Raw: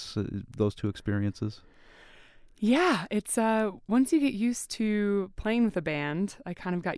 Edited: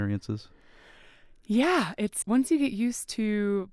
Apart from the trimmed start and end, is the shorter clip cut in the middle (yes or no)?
yes